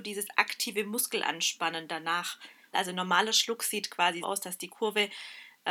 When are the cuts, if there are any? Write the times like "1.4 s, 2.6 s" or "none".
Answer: 2.7 s, 4.2 s